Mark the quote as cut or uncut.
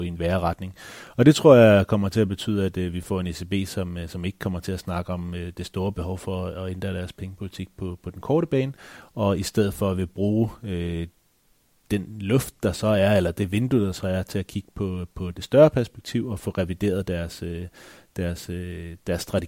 uncut